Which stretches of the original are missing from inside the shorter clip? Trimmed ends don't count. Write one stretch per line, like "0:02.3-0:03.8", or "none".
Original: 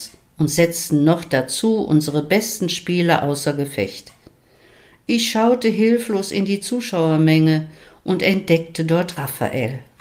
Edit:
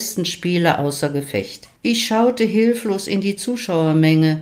0:04.2-0:05.0